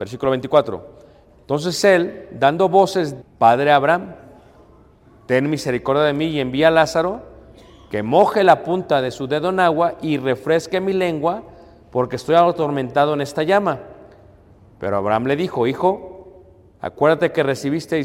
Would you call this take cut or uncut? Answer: cut